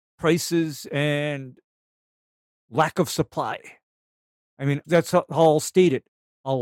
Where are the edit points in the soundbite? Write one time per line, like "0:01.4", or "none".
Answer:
0:04.8